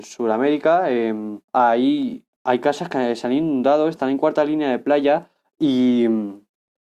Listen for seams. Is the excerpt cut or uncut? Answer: cut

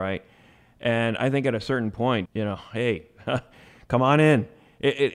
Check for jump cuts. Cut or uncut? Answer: cut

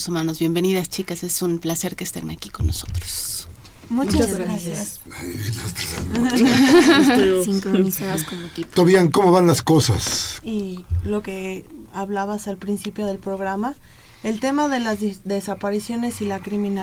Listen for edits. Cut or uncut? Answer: cut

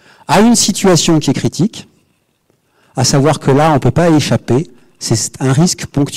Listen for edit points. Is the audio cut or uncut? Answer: uncut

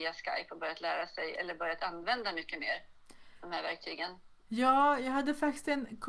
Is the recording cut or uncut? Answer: uncut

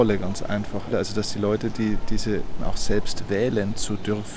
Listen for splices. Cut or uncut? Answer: cut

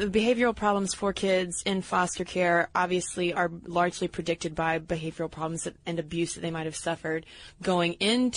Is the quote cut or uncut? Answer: cut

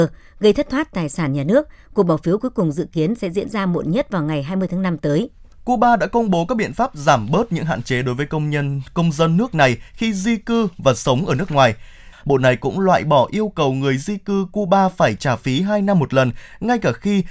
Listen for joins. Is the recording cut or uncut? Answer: cut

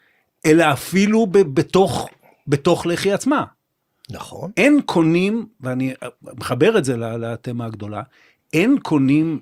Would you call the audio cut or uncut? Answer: uncut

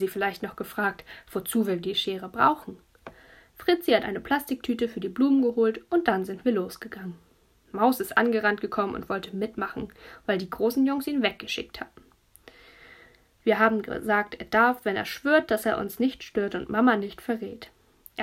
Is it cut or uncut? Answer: uncut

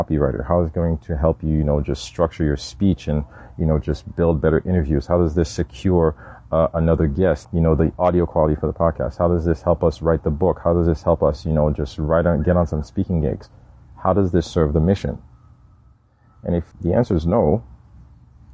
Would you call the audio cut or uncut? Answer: cut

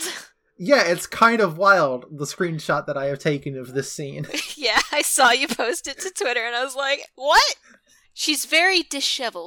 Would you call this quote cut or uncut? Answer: cut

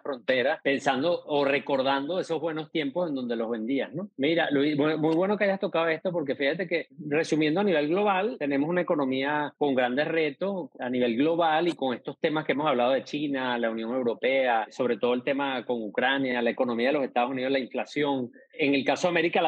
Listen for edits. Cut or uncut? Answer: uncut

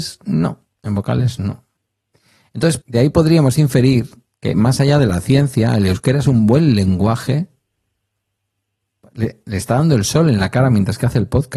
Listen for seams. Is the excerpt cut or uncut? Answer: cut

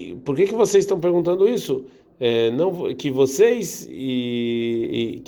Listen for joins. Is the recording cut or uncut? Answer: uncut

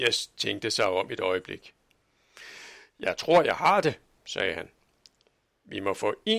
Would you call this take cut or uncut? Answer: uncut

